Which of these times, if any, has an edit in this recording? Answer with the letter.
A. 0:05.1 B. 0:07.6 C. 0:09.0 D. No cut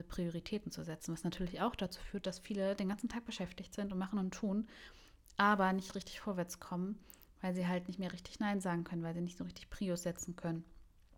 D